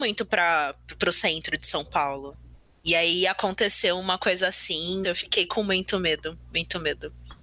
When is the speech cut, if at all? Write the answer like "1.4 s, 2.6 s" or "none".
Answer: 5.0 s

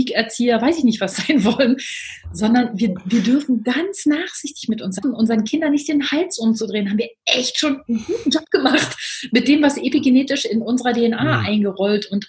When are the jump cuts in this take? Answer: 5.0 s

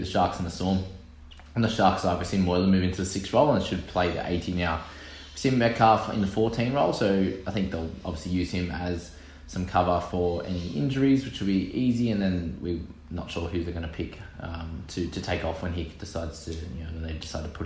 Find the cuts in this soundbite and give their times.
none

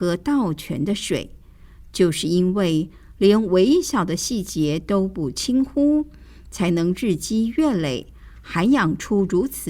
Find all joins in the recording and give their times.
none

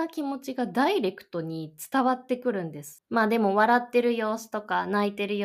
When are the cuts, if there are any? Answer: 3.0 s

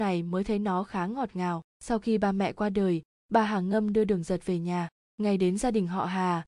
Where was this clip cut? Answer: 1.7 s

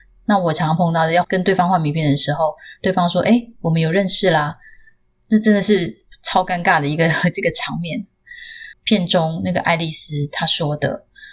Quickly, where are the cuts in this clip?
8.7 s

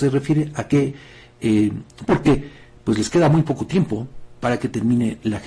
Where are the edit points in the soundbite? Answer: 2.1 s

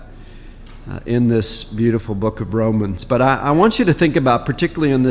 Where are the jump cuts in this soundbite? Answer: none

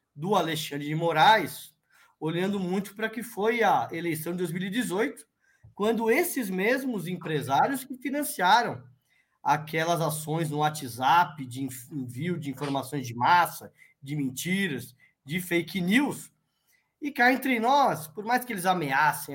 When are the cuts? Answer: none

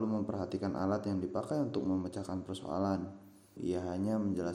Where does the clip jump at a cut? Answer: 3.6 s

